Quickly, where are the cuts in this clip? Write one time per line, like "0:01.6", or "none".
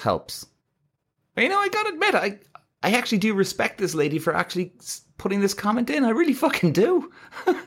none